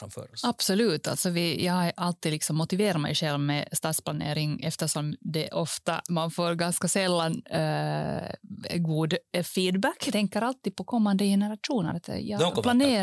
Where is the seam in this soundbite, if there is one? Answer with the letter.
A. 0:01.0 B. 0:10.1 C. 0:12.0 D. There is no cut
B